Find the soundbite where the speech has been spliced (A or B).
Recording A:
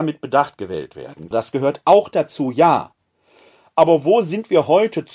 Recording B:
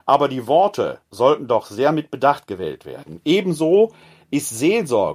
A